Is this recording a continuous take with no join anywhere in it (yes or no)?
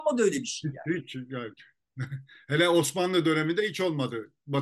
yes